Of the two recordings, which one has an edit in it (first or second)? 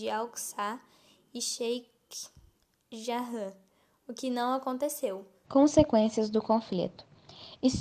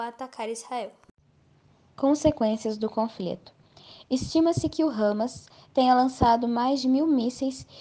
first